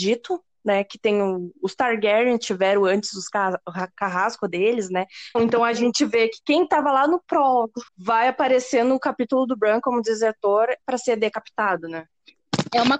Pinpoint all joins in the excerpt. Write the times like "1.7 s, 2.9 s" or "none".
5.3 s, 7.9 s